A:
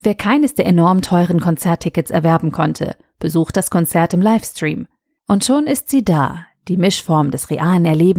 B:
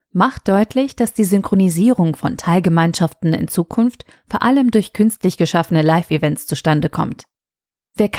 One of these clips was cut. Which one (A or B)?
A